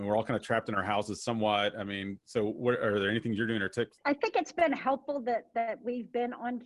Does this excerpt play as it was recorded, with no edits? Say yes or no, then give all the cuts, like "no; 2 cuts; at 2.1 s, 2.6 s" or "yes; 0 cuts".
no; 1 cut; at 4.0 s